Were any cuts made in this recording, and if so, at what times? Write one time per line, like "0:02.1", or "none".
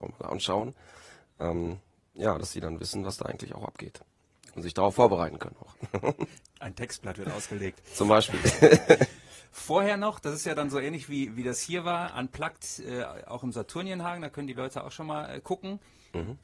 none